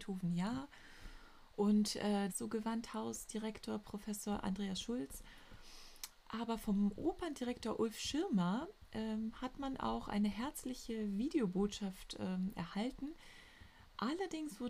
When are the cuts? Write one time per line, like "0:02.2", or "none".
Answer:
0:02.3